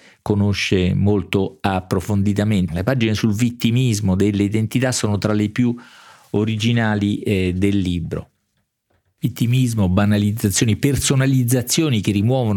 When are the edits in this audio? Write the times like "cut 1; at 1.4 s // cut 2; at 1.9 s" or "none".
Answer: cut 1; at 2.7 s